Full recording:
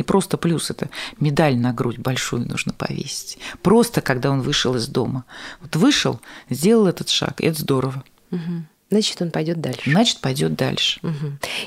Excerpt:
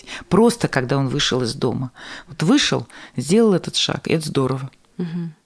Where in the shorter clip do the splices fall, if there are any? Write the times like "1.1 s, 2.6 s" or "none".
none